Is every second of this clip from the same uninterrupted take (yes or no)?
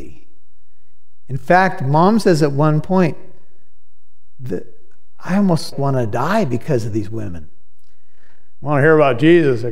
no